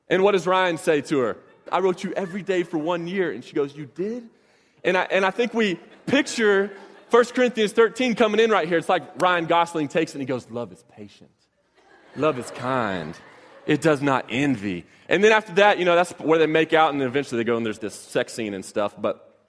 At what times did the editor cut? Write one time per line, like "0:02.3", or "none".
0:01.7
0:17.8